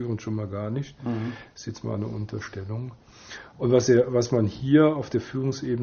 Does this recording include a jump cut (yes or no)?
no